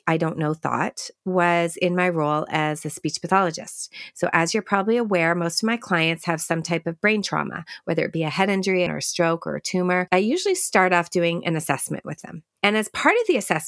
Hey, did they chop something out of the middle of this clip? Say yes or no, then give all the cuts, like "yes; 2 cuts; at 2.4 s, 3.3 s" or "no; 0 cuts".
yes; 1 cut; at 8.9 s